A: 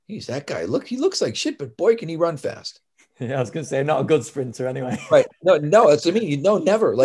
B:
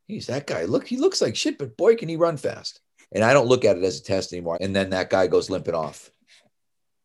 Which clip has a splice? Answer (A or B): B